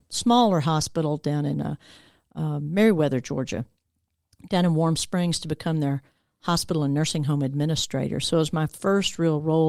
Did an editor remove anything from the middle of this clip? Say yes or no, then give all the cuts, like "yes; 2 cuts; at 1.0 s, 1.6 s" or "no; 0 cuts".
no; 0 cuts